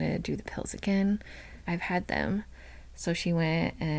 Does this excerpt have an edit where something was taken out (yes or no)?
yes